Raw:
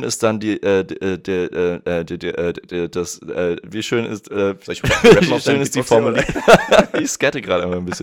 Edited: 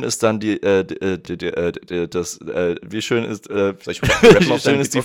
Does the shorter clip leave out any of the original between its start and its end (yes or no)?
yes